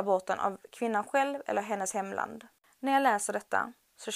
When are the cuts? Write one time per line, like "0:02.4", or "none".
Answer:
none